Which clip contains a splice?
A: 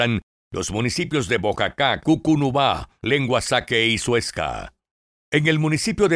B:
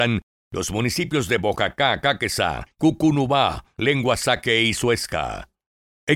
A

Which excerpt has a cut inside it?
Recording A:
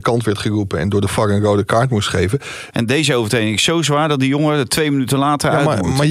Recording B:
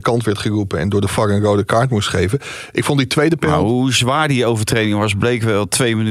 A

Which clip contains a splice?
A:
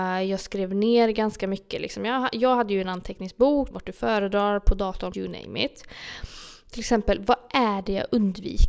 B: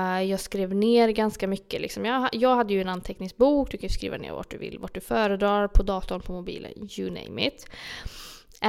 A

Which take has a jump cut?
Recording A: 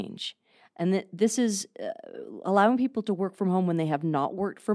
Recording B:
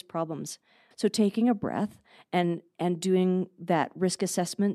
B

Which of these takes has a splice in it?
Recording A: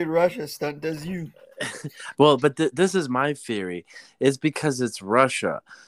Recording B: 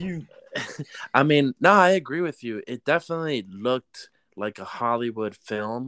A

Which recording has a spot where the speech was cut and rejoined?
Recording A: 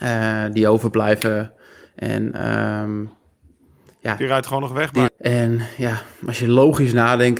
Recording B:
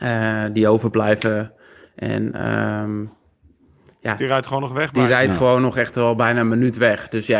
A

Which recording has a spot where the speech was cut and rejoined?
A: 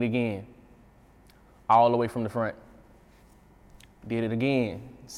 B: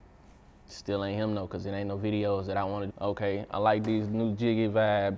B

